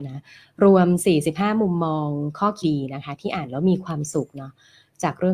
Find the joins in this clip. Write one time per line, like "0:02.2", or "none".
0:02.6